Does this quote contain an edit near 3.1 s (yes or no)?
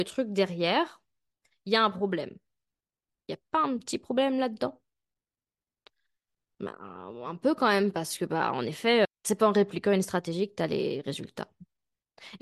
yes